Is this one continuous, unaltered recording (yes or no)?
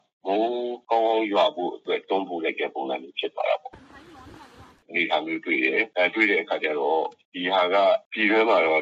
no